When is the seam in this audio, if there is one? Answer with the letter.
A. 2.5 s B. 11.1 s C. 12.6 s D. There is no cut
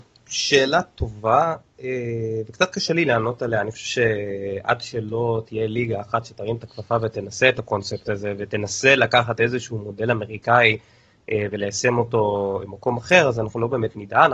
C